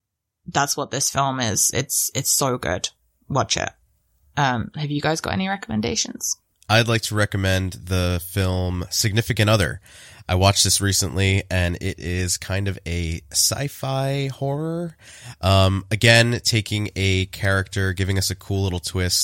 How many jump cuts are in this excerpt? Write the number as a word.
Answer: one